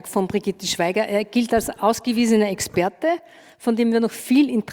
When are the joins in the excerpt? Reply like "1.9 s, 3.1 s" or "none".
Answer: none